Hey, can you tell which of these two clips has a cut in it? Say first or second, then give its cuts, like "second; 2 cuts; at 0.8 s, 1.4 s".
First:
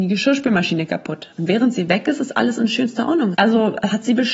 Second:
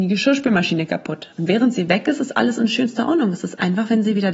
first; 1 cut; at 3.3 s